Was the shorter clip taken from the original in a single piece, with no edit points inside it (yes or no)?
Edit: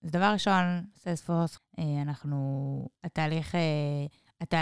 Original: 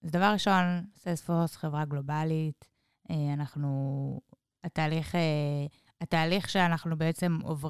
no